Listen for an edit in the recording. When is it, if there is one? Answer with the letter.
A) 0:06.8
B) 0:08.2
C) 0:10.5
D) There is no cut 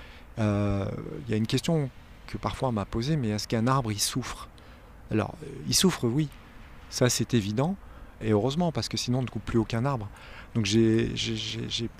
B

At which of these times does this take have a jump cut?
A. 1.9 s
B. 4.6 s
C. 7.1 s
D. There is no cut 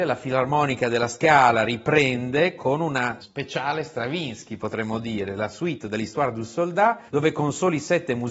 C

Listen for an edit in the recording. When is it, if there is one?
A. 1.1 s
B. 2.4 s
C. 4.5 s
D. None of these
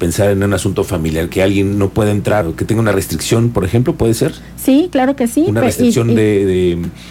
B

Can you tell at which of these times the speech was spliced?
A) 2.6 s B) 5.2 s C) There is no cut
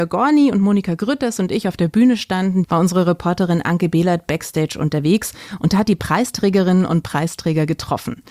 A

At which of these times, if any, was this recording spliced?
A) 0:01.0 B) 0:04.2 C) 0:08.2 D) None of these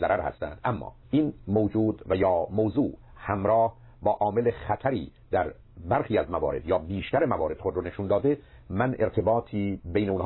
A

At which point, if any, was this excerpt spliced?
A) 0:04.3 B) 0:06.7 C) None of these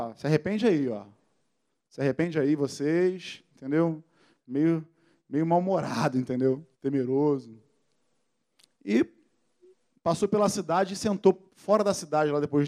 B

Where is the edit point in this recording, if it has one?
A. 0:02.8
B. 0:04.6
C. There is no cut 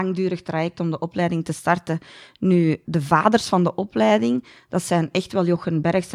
A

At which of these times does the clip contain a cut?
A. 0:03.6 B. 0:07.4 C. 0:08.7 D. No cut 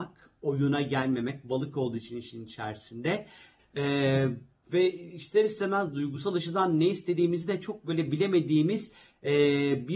A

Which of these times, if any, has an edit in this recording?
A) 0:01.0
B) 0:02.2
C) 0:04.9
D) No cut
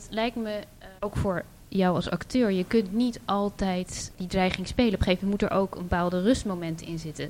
A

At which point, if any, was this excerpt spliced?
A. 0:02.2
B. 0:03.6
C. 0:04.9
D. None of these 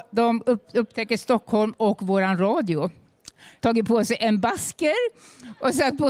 B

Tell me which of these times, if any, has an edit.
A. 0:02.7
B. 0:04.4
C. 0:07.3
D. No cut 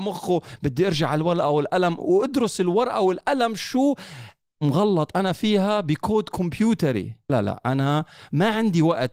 C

